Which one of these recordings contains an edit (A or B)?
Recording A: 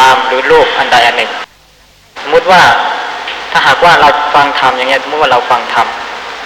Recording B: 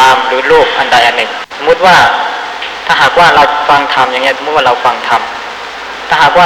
B